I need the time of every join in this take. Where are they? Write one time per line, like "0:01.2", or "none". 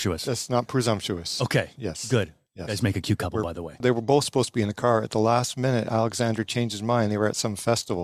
0:03.8